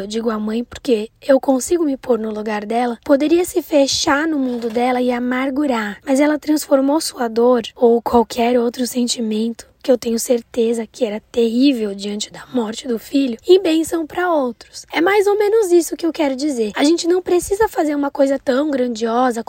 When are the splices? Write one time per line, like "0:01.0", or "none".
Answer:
0:06.0